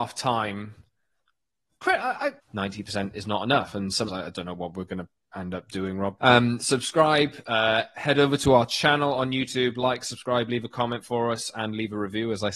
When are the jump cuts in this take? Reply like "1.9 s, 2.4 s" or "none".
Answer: 2.4 s, 4.1 s, 6.2 s